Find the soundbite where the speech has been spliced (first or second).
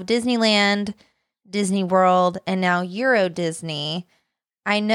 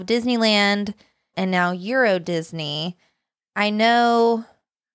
second